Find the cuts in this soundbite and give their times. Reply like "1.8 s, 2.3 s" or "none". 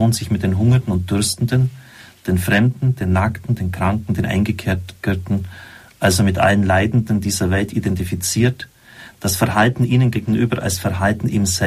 none

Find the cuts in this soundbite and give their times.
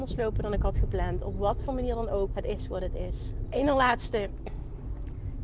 2.3 s, 3.5 s

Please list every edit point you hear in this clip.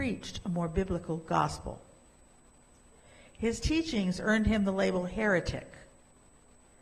none

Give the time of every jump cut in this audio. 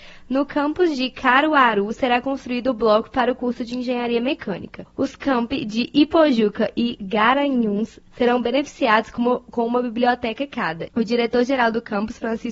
10.9 s

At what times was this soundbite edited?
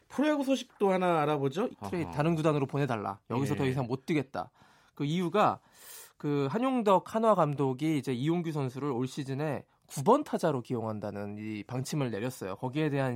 1.7 s

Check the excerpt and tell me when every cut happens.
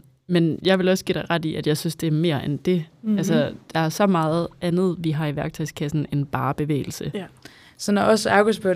none

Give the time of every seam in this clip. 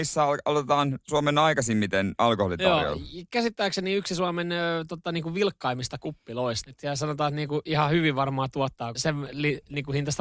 6.6 s, 8.9 s

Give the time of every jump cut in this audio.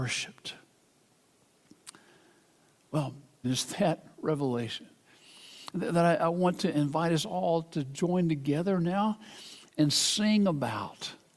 3.4 s

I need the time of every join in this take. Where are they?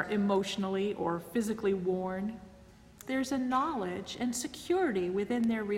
3.0 s

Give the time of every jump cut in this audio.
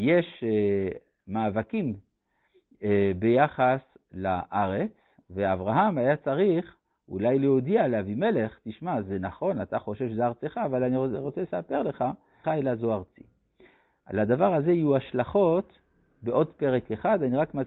12.4 s

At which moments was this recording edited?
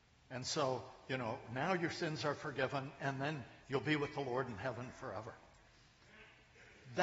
none

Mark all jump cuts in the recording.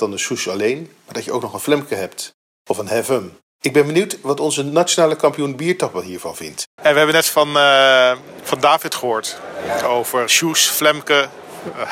6.8 s, 10.3 s

